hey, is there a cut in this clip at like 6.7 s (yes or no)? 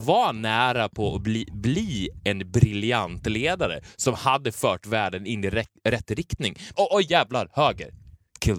yes